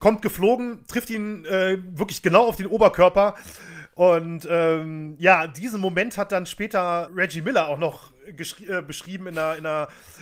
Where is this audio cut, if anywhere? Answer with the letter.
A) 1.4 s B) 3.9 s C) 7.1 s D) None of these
C